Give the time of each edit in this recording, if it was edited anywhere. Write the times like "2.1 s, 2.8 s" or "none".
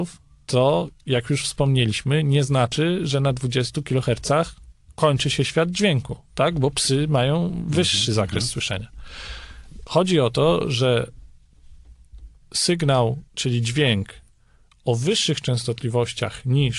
13.3 s